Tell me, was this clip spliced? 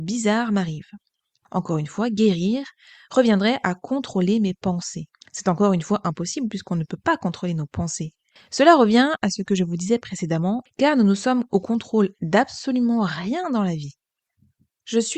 yes; 2 cuts; at 8.4 s, 10.7 s

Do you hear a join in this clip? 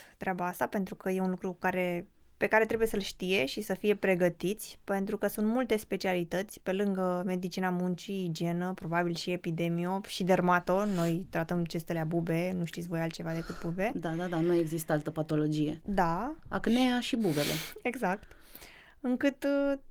no; 0 cuts

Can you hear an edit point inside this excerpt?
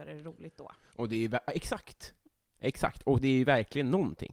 no; 0 cuts

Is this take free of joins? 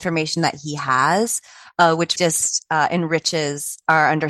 no; 1 cut; at 2.2 s

